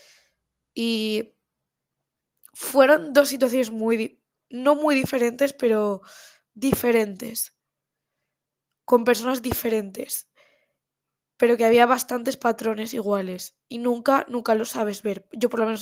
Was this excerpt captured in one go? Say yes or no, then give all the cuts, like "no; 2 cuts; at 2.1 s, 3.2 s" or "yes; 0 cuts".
yes; 0 cuts